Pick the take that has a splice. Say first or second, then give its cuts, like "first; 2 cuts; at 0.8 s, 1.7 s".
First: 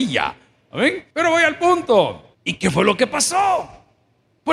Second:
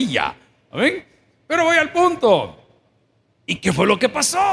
first; 2 cuts; at 1.1 s, 2.3 s